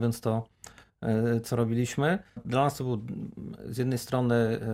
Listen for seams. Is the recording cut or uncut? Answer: cut